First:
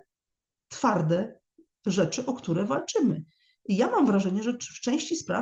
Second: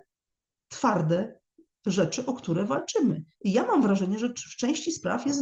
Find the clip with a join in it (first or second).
second